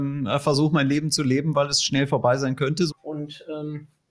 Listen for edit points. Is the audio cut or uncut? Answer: cut